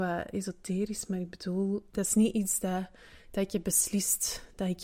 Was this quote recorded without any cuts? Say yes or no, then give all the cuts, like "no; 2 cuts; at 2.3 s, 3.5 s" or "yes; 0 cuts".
no; 1 cut; at 1.9 s